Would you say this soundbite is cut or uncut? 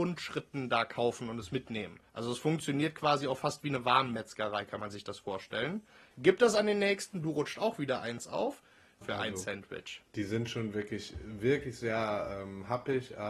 cut